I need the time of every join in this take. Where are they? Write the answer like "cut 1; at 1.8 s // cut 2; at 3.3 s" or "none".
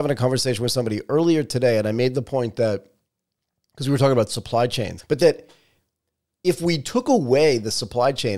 cut 1; at 5.0 s